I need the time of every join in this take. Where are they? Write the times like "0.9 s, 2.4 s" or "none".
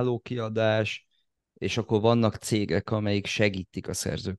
none